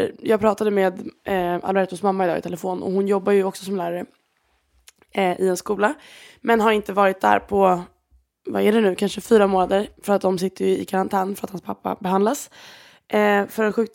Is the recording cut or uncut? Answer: uncut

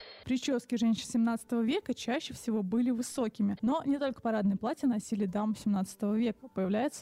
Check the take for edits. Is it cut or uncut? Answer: cut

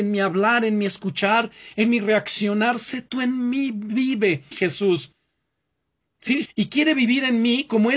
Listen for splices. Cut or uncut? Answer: cut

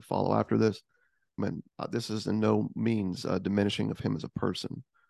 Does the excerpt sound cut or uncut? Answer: cut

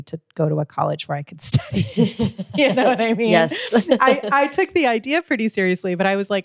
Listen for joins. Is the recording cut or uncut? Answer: uncut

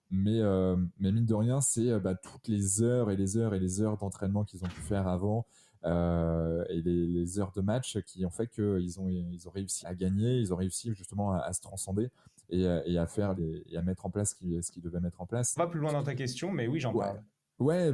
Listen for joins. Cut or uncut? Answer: cut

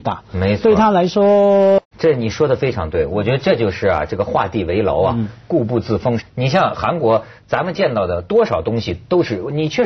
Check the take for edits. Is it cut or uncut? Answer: cut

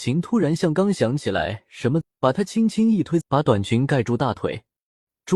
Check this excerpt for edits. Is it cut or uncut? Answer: cut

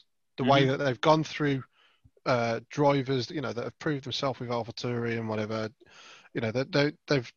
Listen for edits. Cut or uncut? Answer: uncut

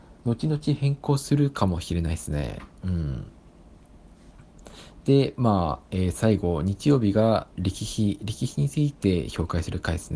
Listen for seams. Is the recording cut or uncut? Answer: uncut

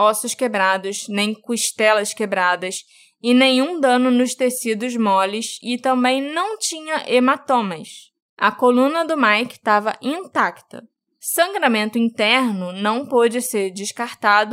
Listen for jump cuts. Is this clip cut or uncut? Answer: uncut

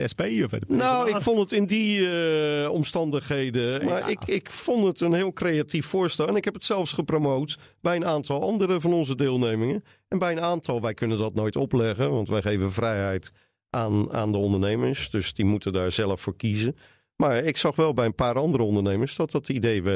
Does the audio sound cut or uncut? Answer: cut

